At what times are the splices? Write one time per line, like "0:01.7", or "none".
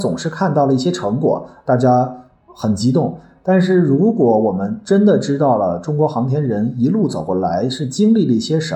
none